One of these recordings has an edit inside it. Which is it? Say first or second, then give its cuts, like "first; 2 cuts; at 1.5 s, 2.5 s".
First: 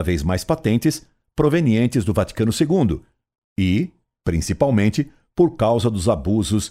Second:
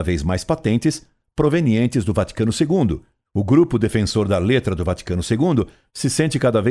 second; 1 cut; at 3.2 s